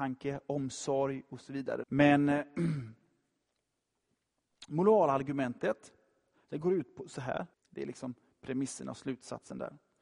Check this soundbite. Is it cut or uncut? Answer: cut